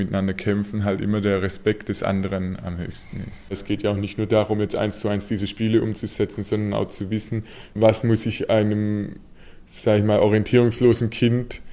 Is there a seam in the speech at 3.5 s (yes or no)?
yes